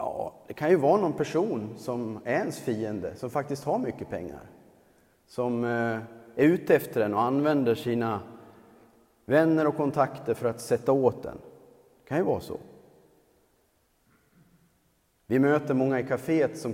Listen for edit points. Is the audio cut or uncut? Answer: uncut